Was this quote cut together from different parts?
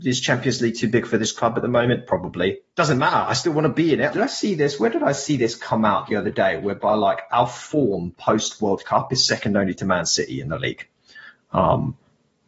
yes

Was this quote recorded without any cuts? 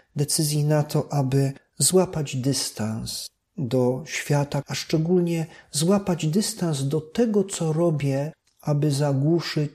no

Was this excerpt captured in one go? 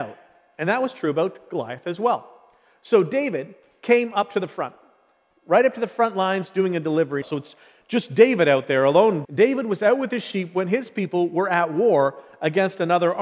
no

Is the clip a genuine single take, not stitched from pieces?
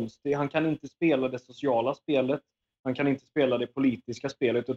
yes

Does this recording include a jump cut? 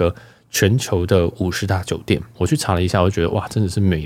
yes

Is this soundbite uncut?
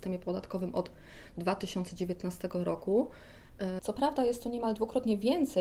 no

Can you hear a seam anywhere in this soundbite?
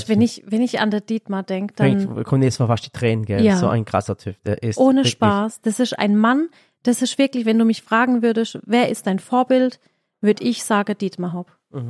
no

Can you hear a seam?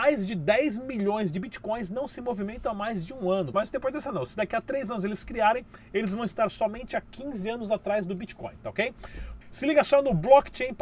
yes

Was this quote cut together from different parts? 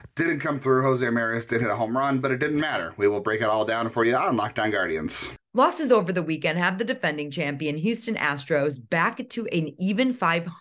no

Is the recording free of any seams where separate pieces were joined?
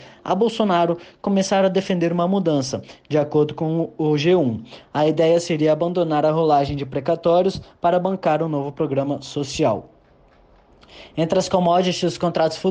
yes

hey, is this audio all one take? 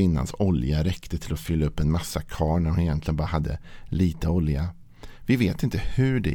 yes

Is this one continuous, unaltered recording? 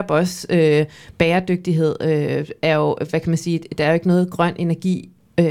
yes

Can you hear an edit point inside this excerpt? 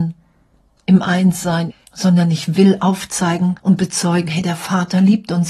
yes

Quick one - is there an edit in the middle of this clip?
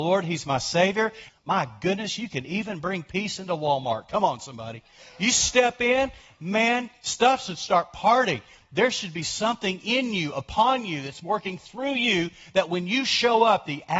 yes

